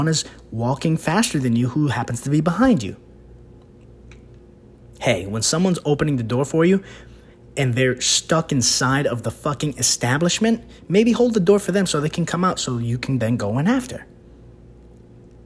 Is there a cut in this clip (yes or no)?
no